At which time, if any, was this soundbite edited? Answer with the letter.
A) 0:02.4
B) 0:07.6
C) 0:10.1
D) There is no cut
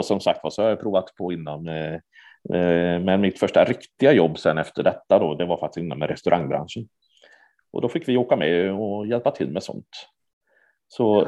B